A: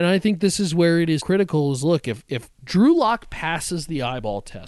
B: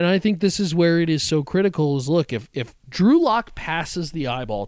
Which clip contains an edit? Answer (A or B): A